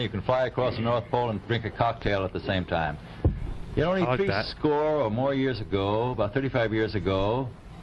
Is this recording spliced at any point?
no; 0 cuts

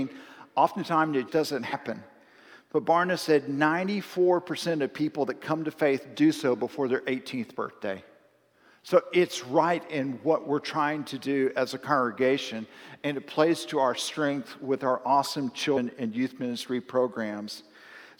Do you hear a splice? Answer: yes; 1 cut; at 1.3 s

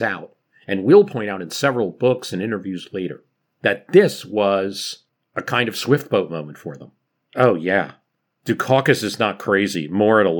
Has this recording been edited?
no; 0 cuts

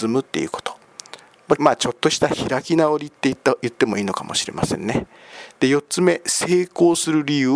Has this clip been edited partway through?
yes; 1 cut; at 1.6 s

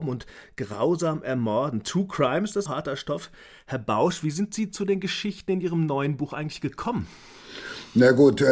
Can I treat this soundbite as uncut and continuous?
no; 1 cut; at 2.7 s

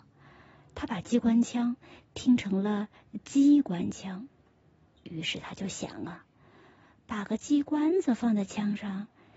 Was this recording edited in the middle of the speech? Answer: no; 0 cuts

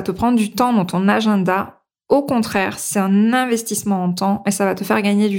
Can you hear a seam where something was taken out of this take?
no; 0 cuts

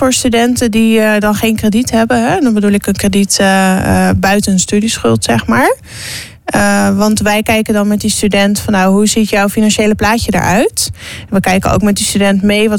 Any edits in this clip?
no; 0 cuts

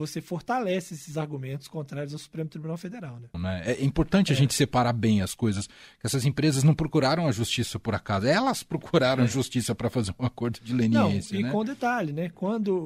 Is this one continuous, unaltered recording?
no; 1 cut; at 3.3 s

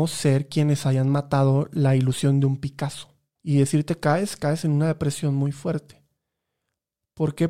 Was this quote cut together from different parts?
yes; 1 cut; at 3.4 s

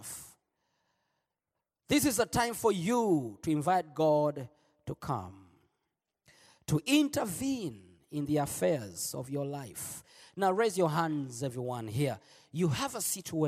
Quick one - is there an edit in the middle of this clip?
no; 0 cuts

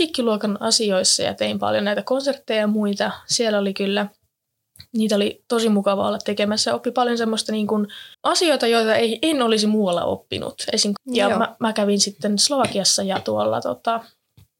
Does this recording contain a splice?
yes; 2 cuts; at 8.1 s, 11.0 s

